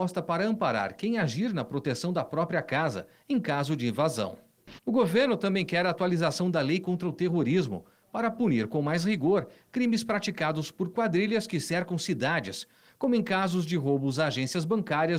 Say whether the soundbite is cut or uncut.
cut